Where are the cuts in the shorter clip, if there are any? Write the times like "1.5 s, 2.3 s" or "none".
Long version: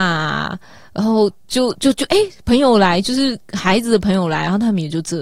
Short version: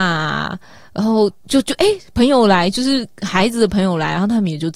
1.4 s